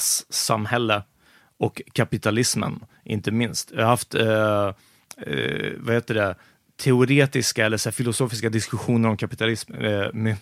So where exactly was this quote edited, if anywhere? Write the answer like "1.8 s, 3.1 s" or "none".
none